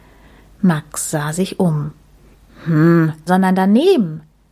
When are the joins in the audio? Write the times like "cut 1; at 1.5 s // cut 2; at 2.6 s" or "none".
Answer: cut 1; at 3.3 s